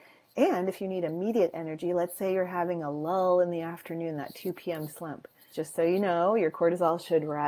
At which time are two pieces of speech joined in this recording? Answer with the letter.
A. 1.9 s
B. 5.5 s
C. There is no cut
B